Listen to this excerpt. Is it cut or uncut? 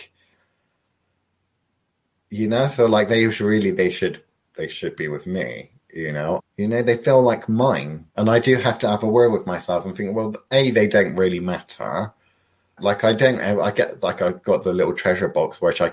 cut